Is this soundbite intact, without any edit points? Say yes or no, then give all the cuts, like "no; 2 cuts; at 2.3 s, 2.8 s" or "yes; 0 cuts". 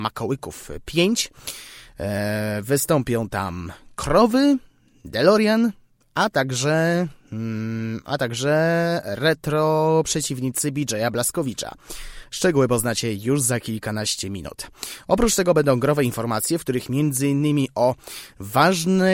yes; 0 cuts